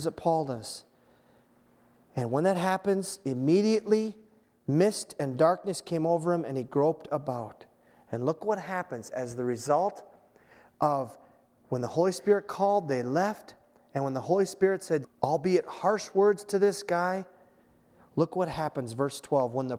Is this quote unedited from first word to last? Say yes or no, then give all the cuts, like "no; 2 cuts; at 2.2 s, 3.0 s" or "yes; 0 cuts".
no; 1 cut; at 15.0 s